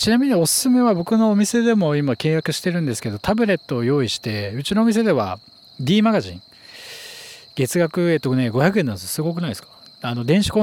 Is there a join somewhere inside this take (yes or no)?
no